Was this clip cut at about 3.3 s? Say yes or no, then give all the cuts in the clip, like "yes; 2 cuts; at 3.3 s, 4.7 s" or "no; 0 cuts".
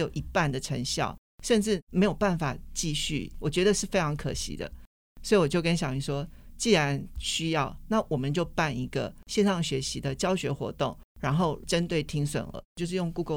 no; 0 cuts